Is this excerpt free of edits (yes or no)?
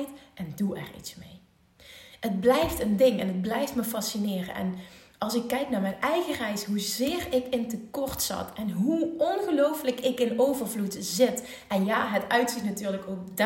yes